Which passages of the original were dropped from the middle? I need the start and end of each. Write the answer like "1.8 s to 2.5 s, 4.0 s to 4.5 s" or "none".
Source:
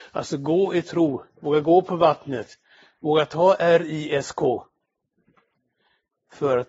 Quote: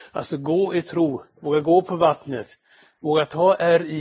none